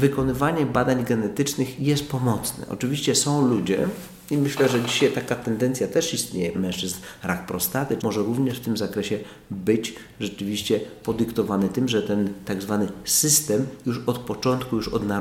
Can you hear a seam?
yes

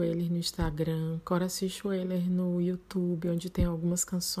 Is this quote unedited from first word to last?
yes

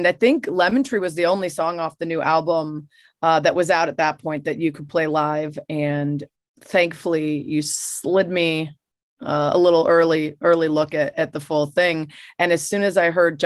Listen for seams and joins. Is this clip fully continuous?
yes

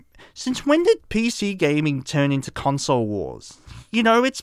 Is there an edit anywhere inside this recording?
no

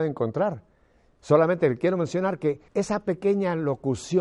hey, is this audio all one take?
no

